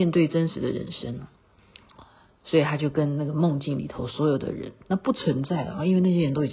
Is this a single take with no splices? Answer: yes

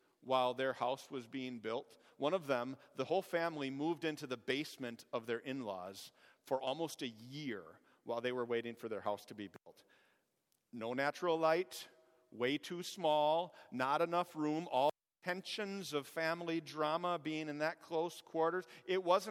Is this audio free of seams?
yes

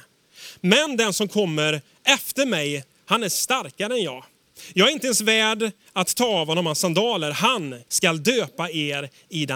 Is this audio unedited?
no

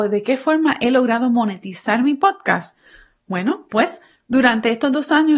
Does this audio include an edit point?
no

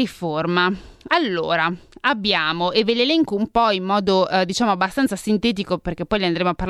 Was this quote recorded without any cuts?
yes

